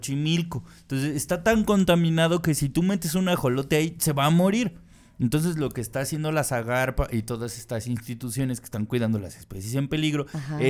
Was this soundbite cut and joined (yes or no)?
no